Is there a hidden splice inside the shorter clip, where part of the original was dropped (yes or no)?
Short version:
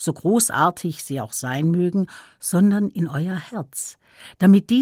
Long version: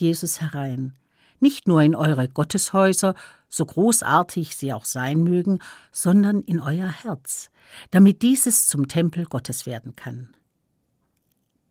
no